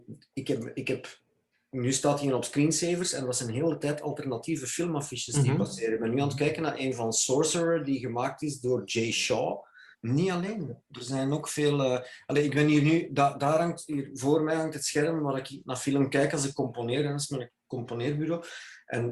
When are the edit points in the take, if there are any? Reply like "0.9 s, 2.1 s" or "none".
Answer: 9.9 s